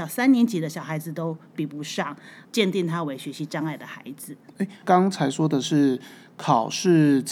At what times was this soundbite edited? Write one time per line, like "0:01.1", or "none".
0:02.5